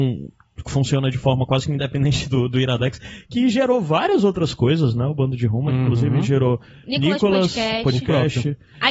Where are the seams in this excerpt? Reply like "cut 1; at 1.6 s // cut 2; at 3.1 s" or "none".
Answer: none